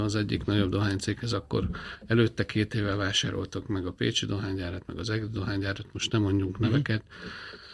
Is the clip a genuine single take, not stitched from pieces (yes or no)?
yes